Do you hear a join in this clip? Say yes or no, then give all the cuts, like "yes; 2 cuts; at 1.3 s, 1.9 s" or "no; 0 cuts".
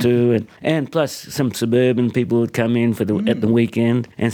no; 0 cuts